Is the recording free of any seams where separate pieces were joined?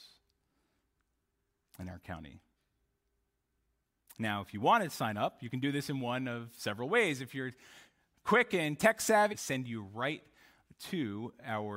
no; 1 cut; at 9.3 s

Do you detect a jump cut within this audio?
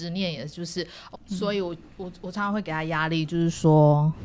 yes; 1 cut; at 1.1 s

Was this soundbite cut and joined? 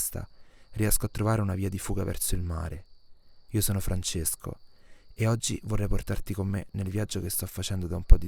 no; 0 cuts

